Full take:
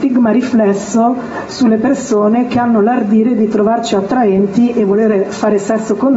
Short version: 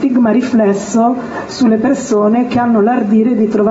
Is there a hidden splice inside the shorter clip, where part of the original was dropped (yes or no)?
no